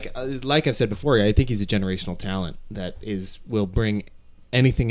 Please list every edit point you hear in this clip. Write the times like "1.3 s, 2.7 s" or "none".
none